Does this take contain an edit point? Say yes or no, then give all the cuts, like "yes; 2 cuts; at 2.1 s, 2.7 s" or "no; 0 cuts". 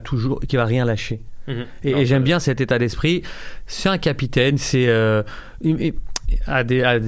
no; 0 cuts